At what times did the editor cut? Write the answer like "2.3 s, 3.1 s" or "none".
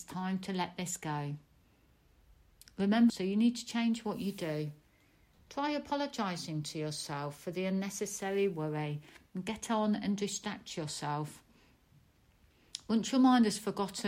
3.1 s